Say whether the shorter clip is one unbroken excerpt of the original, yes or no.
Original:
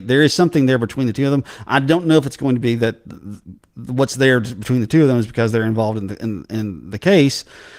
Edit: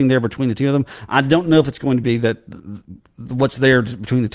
yes